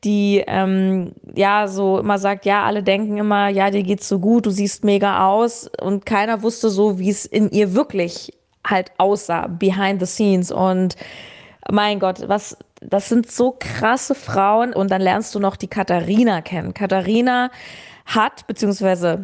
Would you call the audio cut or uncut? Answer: cut